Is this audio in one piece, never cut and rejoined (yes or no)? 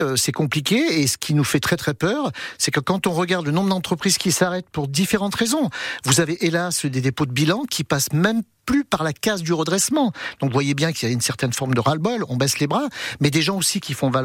yes